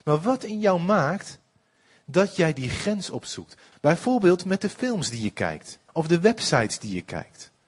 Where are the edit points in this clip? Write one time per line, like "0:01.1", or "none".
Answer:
0:03.7
0:05.9